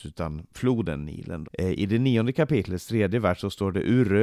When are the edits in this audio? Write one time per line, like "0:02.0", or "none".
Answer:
0:01.4